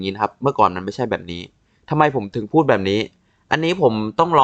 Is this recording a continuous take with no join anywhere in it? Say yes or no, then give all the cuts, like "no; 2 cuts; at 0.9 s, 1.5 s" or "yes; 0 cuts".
yes; 0 cuts